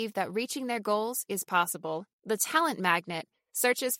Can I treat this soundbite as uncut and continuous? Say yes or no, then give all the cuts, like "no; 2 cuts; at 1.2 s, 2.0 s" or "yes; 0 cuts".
no; 1 cut; at 2.1 s